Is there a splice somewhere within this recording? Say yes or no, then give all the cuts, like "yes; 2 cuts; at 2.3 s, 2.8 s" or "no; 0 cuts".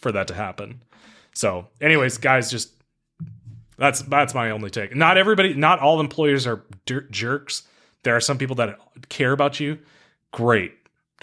no; 0 cuts